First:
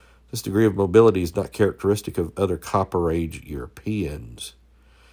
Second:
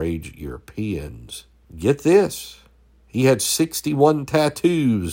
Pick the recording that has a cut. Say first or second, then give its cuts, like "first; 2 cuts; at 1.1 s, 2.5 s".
second; 1 cut; at 1.6 s